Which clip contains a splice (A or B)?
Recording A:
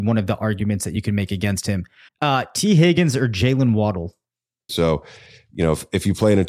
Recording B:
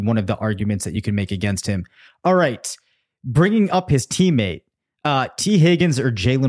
A